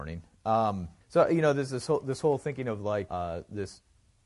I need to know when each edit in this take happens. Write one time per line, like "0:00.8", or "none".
0:01.0
0:03.1